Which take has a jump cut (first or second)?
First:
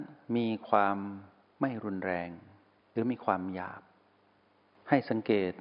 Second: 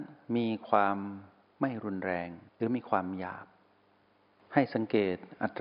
second